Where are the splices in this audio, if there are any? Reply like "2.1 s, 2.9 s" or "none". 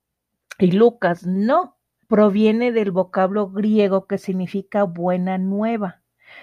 2.0 s

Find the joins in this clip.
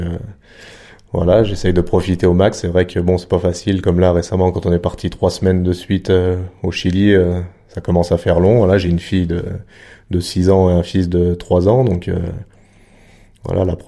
none

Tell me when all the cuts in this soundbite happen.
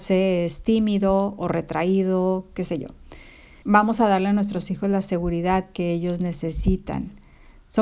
3.6 s

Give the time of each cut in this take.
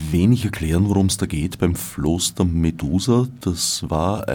none

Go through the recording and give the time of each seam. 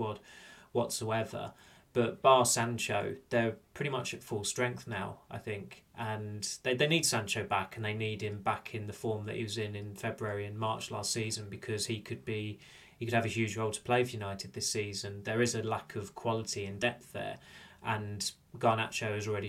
none

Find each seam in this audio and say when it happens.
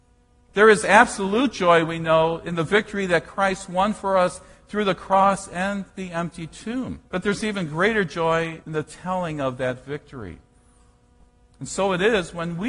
7.1 s

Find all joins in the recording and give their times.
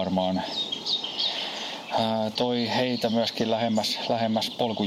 2.4 s

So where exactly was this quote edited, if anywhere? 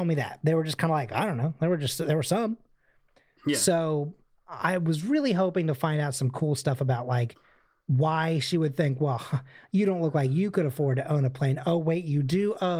none

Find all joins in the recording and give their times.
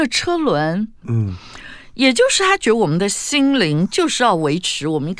1.0 s

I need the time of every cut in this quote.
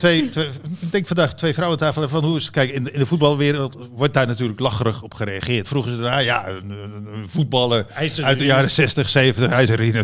5.6 s

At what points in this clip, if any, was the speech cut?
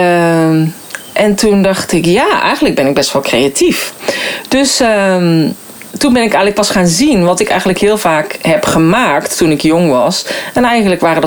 5.9 s

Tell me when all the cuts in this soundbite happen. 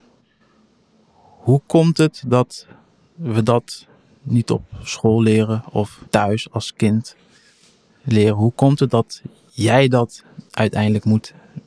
6.0 s

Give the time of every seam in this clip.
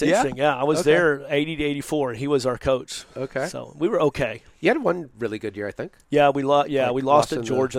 none

